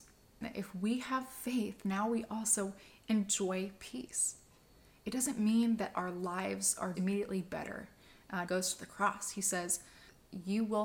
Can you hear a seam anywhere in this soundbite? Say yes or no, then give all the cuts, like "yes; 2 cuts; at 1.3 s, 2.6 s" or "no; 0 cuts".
yes; 2 cuts; at 6.9 s, 8.5 s